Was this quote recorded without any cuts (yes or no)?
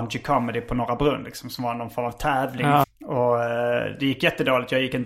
no